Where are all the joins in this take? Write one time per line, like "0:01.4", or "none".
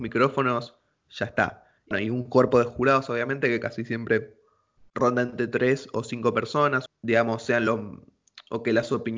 0:01.9
0:06.9